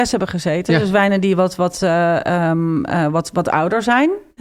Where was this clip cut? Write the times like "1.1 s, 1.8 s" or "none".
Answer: none

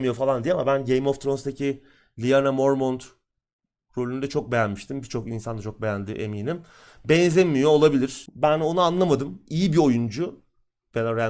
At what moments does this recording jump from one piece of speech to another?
8.3 s

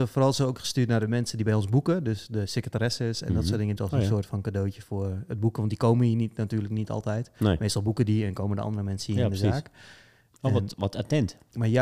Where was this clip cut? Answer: 3.8 s

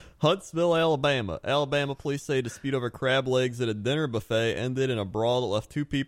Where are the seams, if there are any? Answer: none

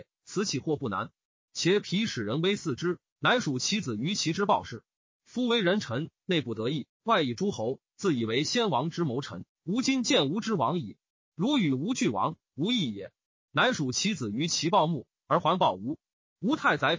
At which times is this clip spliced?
3.1 s, 9.5 s

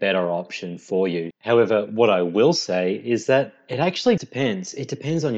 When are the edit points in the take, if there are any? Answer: 1.3 s, 4.2 s

